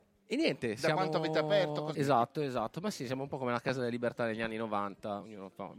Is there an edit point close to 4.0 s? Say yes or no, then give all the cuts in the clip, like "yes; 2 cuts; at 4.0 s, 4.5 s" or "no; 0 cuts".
no; 1 cut; at 1.9 s